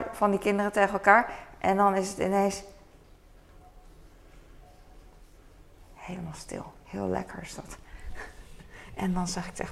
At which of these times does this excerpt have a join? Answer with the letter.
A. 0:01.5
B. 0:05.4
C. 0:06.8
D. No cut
C